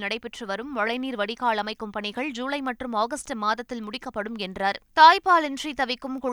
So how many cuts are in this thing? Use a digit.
1